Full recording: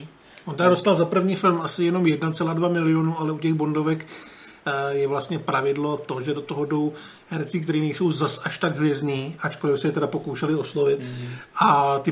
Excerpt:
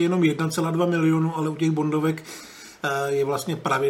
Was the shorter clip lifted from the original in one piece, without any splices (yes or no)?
yes